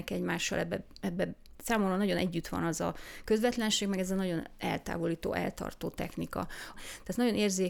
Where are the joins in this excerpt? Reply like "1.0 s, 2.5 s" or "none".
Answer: 6.7 s